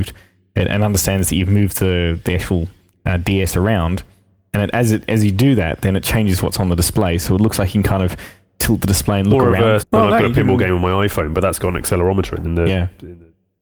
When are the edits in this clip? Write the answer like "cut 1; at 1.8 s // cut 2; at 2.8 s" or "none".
cut 1; at 9.8 s // cut 2; at 12.4 s